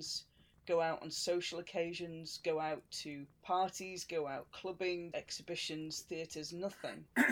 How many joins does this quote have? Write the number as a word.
two